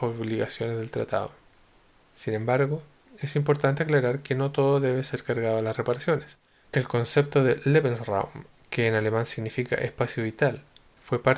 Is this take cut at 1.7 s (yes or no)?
no